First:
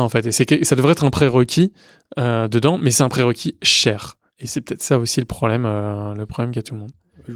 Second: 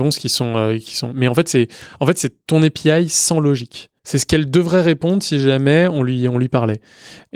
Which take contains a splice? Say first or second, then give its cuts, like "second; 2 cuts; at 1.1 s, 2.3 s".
second; 1 cut; at 4.0 s